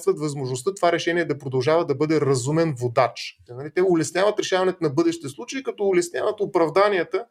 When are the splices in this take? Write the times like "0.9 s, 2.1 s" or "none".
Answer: 3.5 s

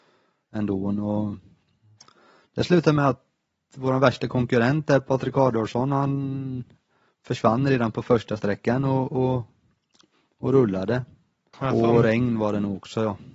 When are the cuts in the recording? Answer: 11.5 s

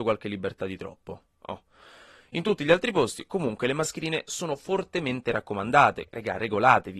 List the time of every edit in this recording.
6.1 s

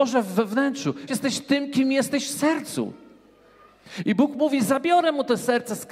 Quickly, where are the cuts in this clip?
1.1 s

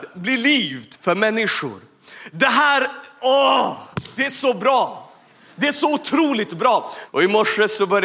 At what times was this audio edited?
7.1 s

